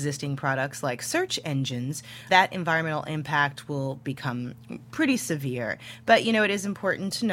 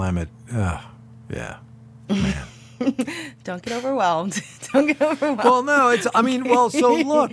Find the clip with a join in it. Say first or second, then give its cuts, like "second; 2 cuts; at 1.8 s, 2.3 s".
first; 1 cut; at 2.3 s